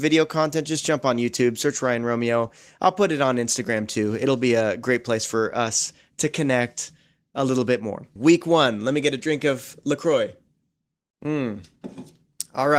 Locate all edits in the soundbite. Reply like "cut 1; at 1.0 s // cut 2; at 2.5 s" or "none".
cut 1; at 8.2 s